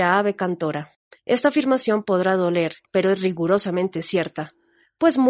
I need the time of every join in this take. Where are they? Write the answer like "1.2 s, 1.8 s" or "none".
1.1 s, 2.9 s